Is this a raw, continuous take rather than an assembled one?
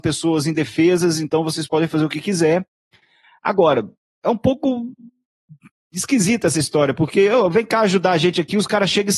yes; 0 cuts

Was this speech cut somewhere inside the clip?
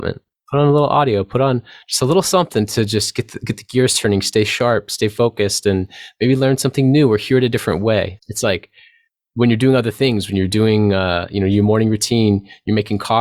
yes; 1 cut; at 8.2 s

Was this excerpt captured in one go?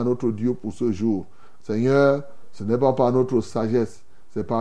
no; 1 cut; at 1.6 s

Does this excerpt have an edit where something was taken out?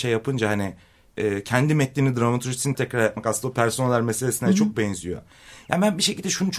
yes; 1 cut; at 2.7 s

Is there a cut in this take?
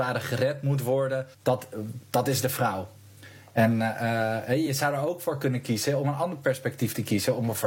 yes; 1 cut; at 1.3 s

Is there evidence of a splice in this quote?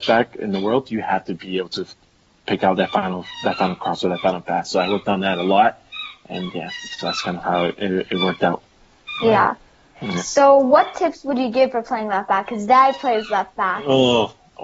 no; 0 cuts

